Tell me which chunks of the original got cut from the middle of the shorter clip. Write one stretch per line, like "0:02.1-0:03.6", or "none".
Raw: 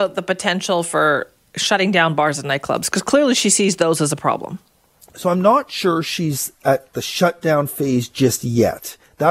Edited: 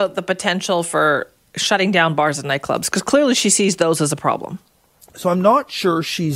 none